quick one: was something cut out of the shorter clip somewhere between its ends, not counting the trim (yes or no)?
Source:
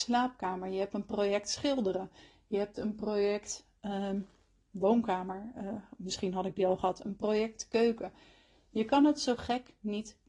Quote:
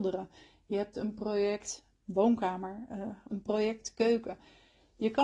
yes